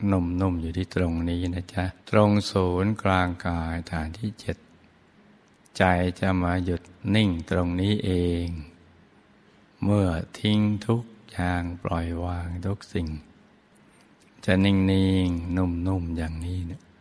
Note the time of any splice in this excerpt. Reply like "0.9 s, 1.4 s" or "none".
2.0 s